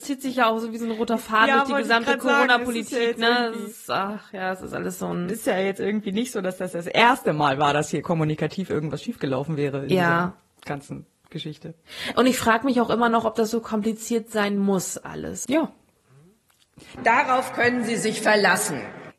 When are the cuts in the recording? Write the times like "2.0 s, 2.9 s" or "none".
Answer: 15.4 s, 17.0 s